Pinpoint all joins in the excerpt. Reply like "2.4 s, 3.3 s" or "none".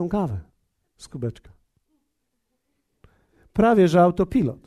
none